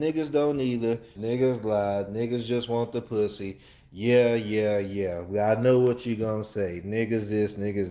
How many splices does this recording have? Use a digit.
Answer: 1